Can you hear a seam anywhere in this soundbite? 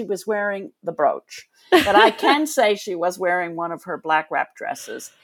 no; 0 cuts

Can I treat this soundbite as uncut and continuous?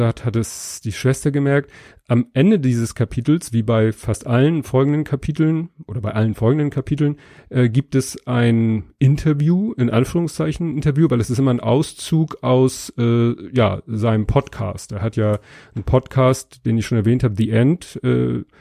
yes; 0 cuts

